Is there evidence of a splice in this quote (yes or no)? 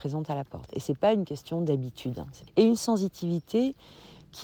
yes